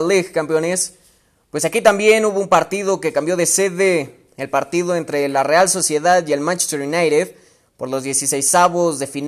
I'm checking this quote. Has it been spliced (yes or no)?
no